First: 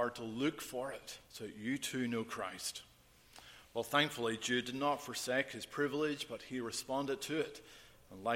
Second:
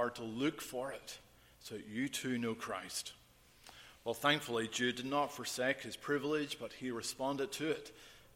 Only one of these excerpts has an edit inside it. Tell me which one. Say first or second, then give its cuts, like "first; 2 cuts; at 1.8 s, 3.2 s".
first; 1 cut; at 1.2 s